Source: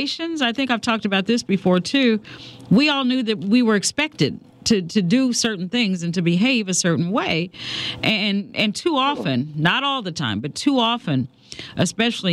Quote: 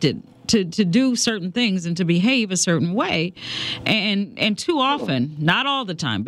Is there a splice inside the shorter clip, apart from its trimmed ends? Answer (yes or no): no